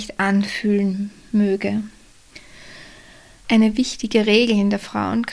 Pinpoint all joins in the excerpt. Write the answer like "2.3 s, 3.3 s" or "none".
3.4 s